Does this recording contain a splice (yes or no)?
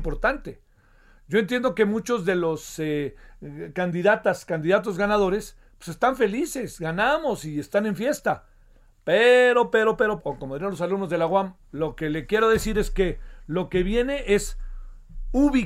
yes